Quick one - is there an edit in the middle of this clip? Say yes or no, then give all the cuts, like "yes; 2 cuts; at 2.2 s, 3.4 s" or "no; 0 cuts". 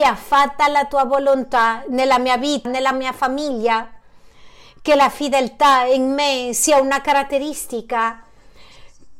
yes; 1 cut; at 2.6 s